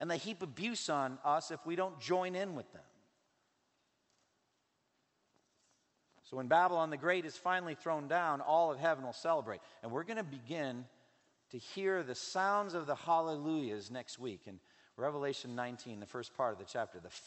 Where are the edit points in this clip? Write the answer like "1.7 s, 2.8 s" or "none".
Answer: none